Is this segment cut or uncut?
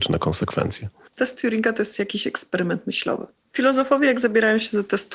cut